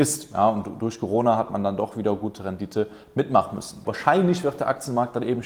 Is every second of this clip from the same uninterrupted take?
no; 1 cut; at 3.8 s

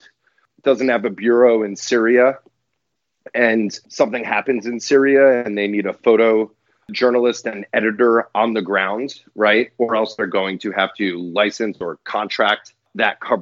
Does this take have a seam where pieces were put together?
no; 0 cuts

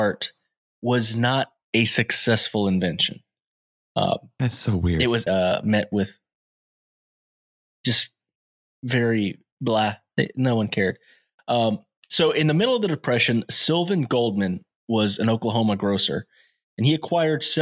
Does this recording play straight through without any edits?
no; 1 cut; at 5.3 s

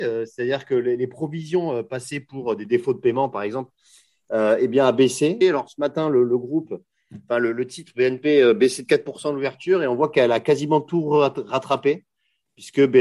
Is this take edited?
yes; 1 cut; at 5.4 s

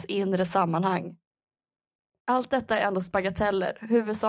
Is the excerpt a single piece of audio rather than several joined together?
yes; 0 cuts

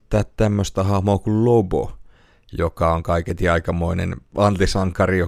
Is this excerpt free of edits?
yes; 0 cuts

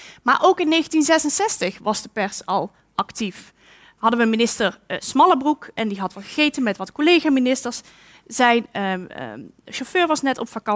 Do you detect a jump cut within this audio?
no; 0 cuts

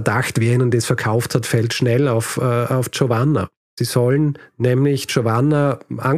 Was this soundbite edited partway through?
yes; 1 cut; at 3.7 s

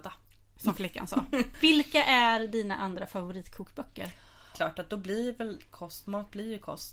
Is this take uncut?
no; 1 cut; at 4.5 s

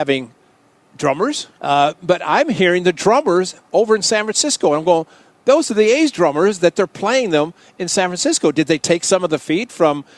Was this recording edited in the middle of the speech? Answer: yes; 1 cut; at 1.6 s

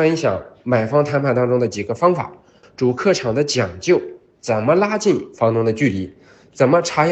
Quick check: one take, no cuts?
no; 1 cut; at 2.6 s

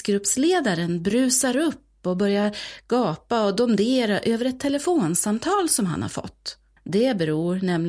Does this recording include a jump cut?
yes; 1 cut; at 6.8 s

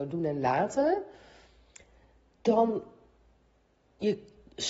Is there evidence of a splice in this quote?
no; 0 cuts

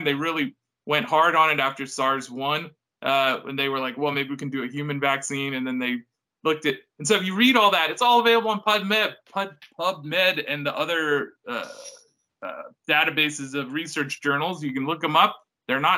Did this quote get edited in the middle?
no; 0 cuts

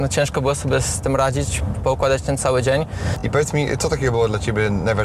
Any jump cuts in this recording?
no; 0 cuts

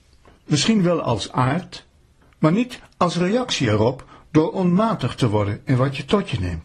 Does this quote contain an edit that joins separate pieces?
yes; 1 cut; at 2.2 s

